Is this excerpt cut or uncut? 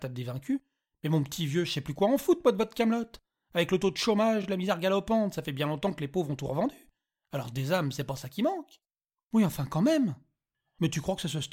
uncut